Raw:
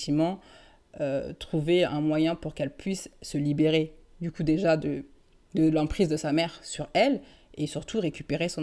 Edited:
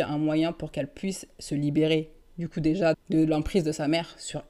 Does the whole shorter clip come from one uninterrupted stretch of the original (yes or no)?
no